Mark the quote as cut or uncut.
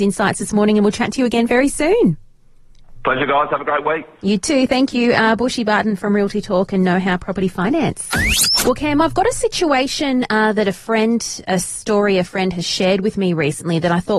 uncut